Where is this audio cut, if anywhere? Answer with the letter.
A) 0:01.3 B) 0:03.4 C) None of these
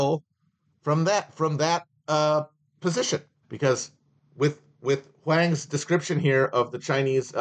B